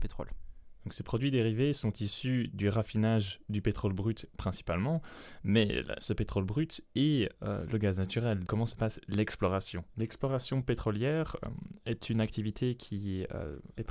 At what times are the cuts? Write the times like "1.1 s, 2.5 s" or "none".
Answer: 6.0 s, 8.5 s

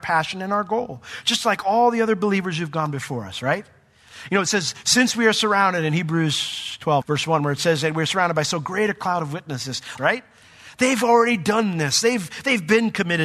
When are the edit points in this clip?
7.0 s, 10.0 s

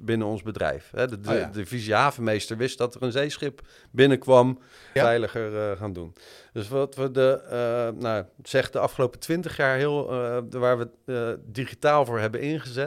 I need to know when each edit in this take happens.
5.0 s

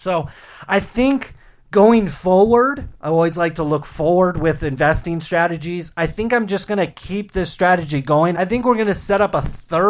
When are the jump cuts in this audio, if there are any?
8.3 s

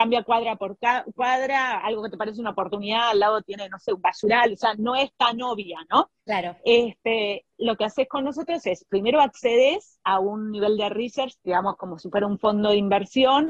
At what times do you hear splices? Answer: 7.5 s, 11.4 s

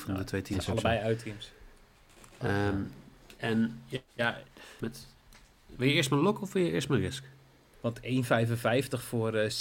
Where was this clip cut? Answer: 4.8 s, 7.7 s

